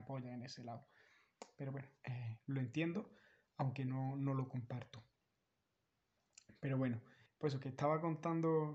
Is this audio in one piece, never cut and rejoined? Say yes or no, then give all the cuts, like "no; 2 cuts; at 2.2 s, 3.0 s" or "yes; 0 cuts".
no; 1 cut; at 7.3 s